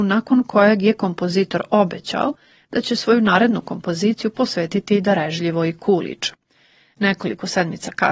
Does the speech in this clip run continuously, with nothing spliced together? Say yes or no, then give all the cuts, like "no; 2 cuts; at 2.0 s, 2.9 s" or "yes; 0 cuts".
yes; 0 cuts